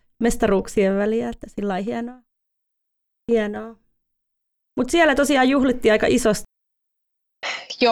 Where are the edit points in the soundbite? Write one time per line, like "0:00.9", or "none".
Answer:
none